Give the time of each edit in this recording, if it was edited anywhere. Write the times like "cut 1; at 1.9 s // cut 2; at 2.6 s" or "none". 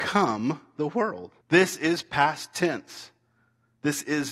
cut 1; at 1.4 s